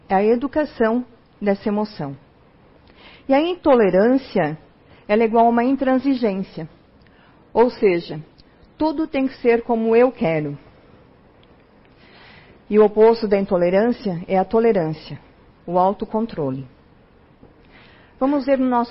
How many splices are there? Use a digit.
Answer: 1